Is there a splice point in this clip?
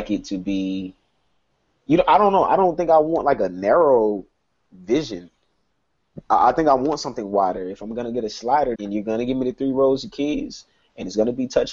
yes; 1 cut; at 8.7 s

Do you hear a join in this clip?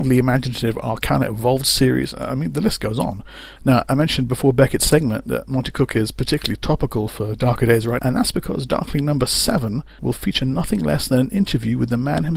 yes; 3 cuts; at 3.6 s, 8.0 s, 10.0 s

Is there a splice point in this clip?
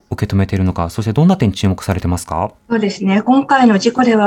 yes; 1 cut; at 2.6 s

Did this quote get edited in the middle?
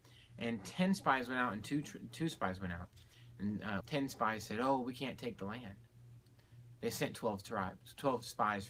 yes; 2 cuts; at 3.8 s, 6.8 s

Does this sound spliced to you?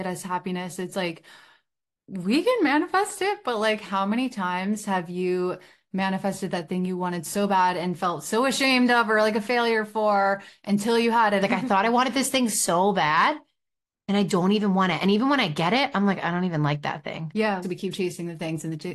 yes; 2 cuts; at 11.4 s, 17.6 s

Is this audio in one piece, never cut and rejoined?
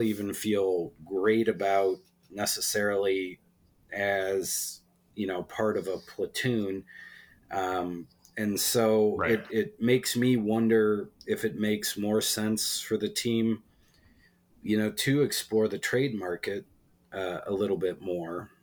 yes; 0 cuts

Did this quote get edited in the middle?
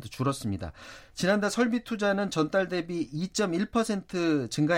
no; 0 cuts

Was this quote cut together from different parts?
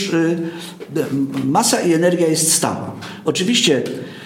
no; 0 cuts

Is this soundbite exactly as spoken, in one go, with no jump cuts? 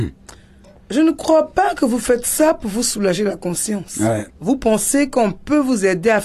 no; 1 cut; at 4.3 s

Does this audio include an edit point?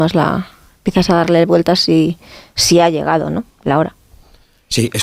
no; 0 cuts

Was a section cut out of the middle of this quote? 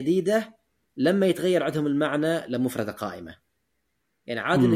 no; 0 cuts

